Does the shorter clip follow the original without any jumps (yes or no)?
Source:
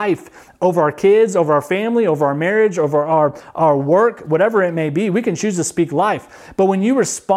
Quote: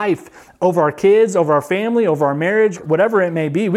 no